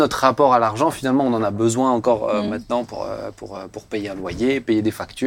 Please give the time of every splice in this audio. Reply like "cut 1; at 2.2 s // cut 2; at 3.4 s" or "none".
none